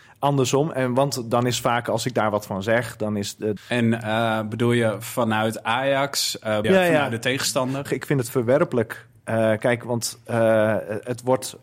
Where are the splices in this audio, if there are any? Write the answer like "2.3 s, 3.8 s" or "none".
3.6 s, 6.6 s, 7.9 s